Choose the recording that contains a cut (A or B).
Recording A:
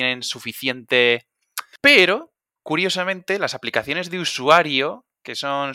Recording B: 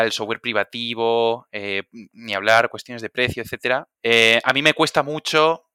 A